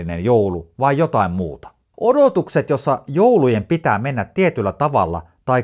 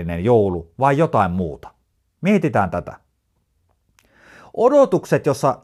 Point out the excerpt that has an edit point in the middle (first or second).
first